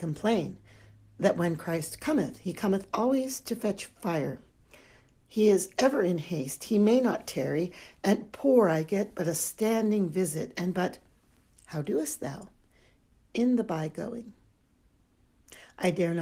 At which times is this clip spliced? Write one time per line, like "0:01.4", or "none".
none

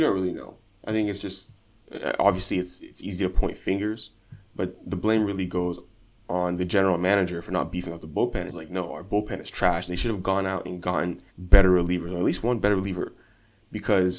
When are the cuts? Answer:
0:08.5
0:09.9
0:11.3

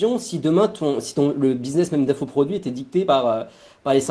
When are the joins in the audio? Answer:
none

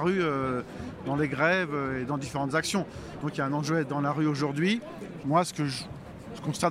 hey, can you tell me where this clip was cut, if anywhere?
0:03.2
0:05.2

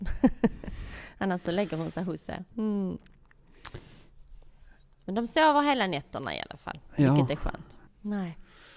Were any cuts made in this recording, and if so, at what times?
0:02.5
0:07.9

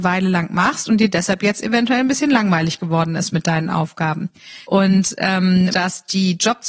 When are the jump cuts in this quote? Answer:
0:04.6
0:05.7

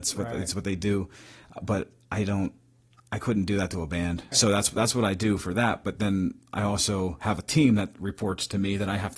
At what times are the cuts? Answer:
0:04.3

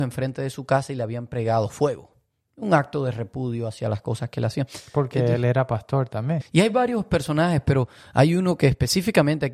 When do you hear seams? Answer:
0:06.4

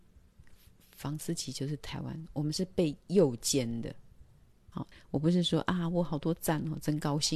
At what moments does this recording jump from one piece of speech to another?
0:04.7

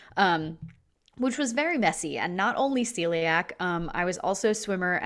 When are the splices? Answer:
none

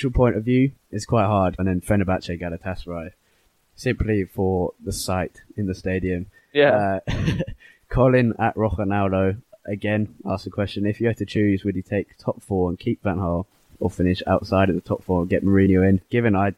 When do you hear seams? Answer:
0:01.6

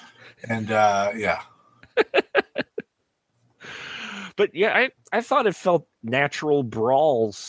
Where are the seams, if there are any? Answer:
0:04.7
0:06.0

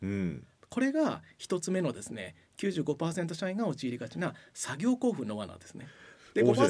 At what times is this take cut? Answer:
none

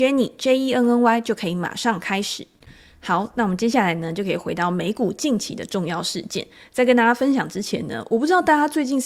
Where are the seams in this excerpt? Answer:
none

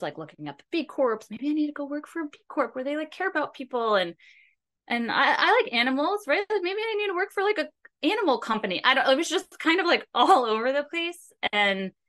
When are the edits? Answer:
none

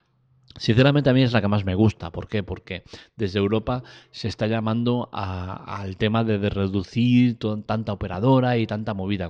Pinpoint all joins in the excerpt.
none

